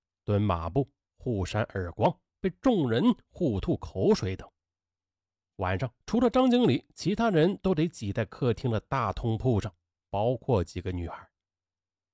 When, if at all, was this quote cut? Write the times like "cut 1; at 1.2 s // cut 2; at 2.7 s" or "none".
cut 1; at 6.0 s